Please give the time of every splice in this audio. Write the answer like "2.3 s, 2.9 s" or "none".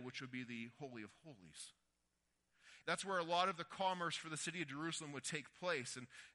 2.8 s